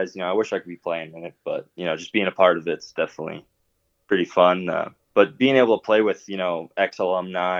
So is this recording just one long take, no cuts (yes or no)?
yes